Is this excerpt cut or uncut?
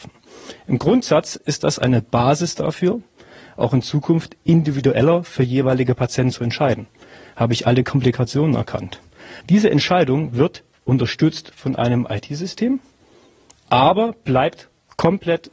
cut